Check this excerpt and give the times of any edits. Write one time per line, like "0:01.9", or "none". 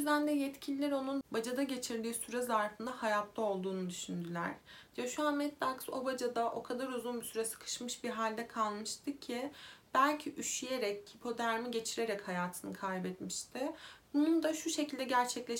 0:11.1
0:14.0